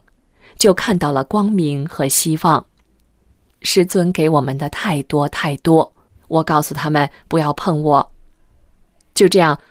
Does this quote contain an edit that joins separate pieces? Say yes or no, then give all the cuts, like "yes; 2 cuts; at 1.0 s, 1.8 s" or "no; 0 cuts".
yes; 1 cut; at 6.1 s